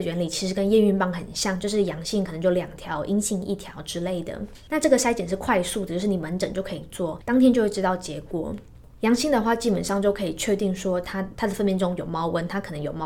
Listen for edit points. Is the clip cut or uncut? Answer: cut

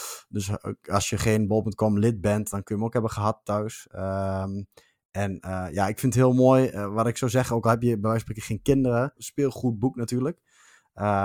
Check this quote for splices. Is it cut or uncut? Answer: cut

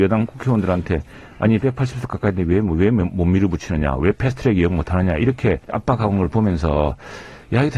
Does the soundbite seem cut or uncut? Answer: cut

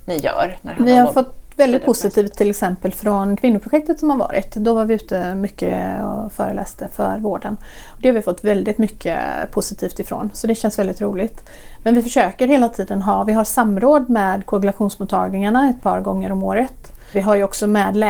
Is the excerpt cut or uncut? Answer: uncut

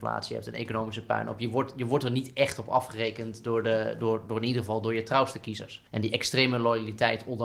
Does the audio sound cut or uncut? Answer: cut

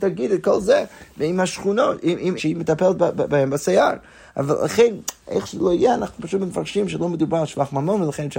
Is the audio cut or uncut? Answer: cut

